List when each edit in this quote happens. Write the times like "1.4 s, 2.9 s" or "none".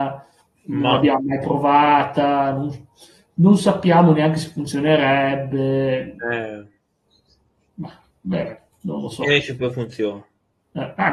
none